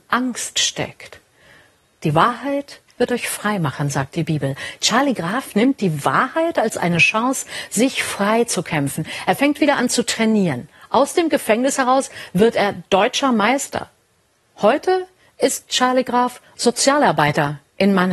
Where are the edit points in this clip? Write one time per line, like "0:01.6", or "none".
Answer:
none